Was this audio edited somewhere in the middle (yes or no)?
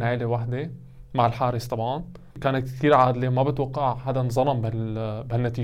yes